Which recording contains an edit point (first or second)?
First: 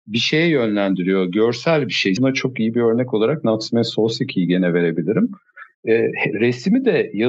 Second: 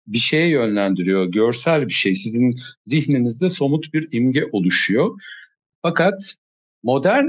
first